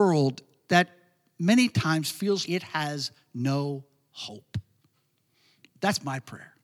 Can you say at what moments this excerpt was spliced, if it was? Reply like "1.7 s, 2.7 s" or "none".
2.5 s